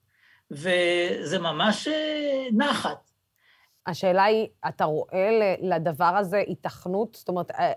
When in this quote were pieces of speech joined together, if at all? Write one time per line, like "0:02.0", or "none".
0:03.8